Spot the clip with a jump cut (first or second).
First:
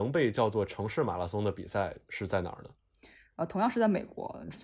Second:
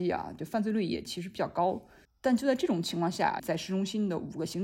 second